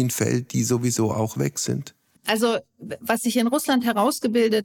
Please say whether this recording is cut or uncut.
cut